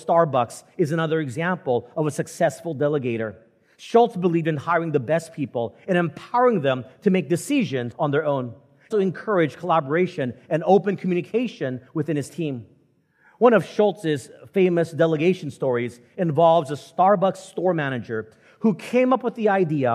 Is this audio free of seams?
no; 1 cut; at 8.9 s

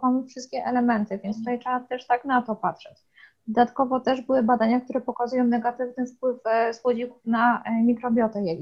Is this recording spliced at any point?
no; 0 cuts

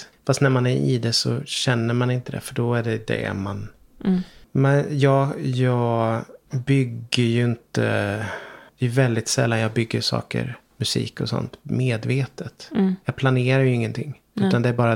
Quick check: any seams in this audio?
no; 0 cuts

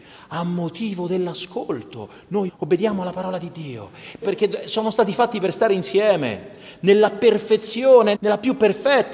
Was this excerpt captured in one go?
no; 3 cuts; at 2.5 s, 4.2 s, 8.1 s

